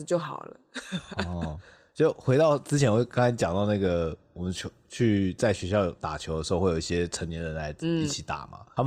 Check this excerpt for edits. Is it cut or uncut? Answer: uncut